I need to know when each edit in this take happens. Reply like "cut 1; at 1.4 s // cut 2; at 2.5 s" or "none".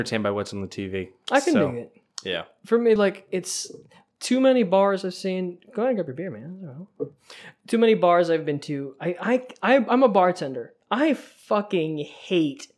none